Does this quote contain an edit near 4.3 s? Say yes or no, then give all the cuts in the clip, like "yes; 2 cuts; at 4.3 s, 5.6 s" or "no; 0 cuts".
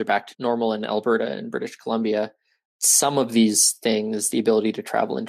no; 0 cuts